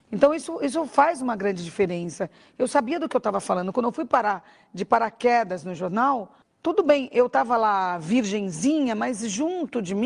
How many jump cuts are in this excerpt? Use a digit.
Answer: 0